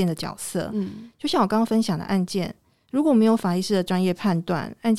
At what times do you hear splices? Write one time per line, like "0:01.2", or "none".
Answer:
none